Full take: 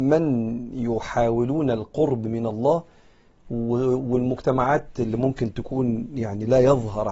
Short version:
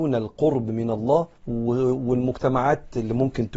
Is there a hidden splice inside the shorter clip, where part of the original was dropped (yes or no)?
yes